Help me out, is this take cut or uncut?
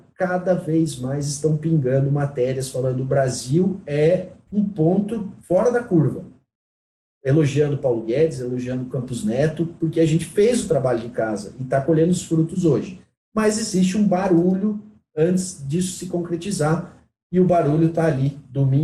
uncut